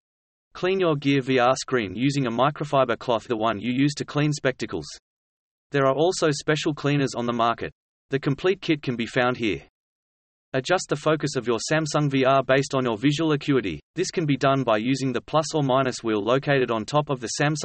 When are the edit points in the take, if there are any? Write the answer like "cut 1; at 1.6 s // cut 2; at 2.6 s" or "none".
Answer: cut 1; at 3.3 s // cut 2; at 13.9 s